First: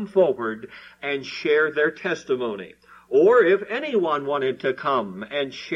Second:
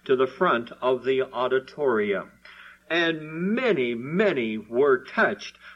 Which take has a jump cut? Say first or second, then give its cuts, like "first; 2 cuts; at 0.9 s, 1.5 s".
second; 1 cut; at 2.8 s